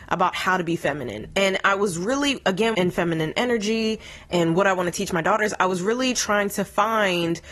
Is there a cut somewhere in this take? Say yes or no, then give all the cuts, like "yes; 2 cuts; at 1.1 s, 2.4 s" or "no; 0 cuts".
yes; 1 cut; at 2.7 s